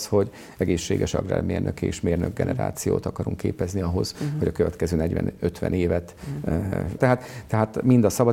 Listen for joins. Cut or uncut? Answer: cut